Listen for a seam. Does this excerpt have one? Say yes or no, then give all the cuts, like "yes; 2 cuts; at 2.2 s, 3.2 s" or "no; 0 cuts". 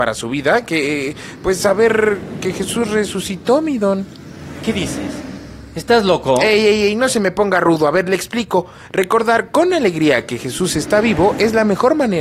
no; 0 cuts